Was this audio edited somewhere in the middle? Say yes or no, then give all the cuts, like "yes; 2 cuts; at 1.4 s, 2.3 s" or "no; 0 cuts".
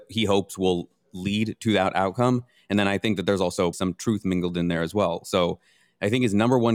yes; 1 cut; at 3.7 s